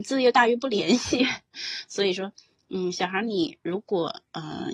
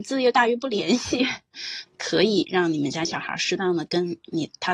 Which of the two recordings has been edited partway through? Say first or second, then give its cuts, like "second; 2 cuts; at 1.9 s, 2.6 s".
second; 1 cut; at 1.9 s